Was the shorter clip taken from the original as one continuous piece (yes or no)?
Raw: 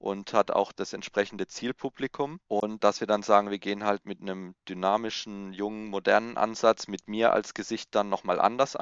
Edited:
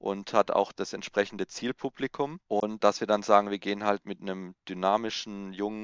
yes